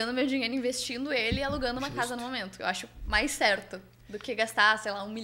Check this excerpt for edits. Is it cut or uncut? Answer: uncut